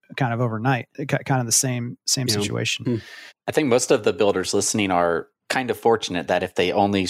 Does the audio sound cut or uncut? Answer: uncut